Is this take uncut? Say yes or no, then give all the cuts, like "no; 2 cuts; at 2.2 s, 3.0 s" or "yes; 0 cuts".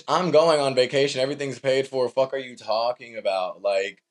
yes; 0 cuts